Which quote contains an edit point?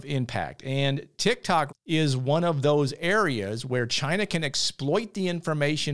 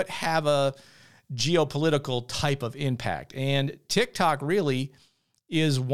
first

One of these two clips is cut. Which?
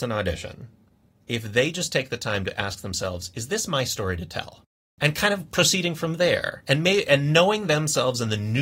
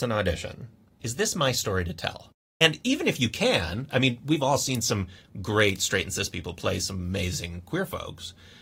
second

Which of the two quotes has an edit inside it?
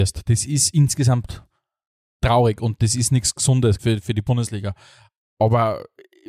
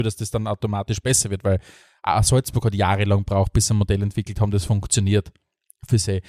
first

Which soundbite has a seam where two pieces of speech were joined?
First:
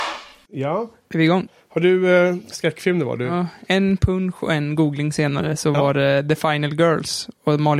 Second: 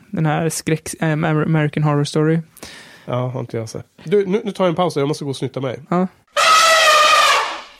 first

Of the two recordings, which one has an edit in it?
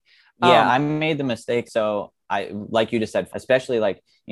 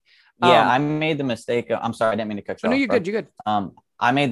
first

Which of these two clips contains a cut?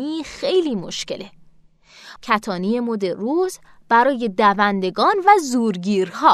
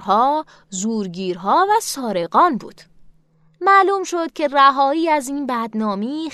first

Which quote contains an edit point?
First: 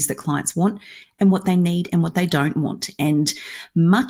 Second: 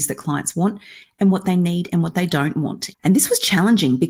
second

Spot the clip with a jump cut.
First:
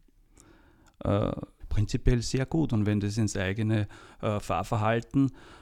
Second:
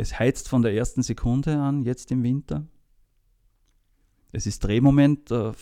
first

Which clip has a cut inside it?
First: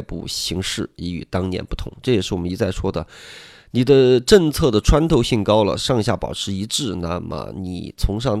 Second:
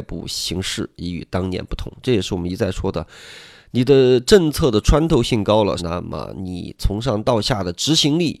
second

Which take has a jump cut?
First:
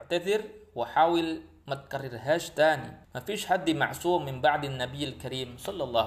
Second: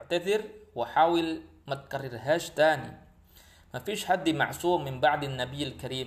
first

